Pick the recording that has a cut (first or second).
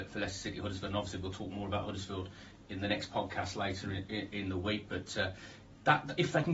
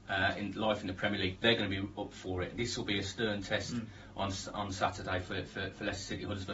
second